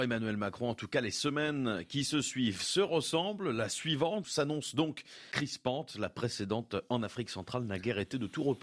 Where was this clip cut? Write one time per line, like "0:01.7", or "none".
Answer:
none